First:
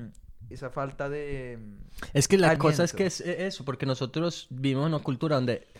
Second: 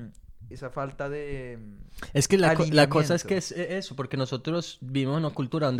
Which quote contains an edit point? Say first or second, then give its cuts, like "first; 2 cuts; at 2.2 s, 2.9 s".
first; 1 cut; at 2.6 s